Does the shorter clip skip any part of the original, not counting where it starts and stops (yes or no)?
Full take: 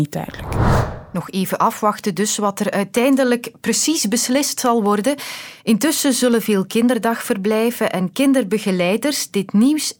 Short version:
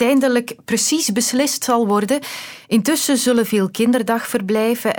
no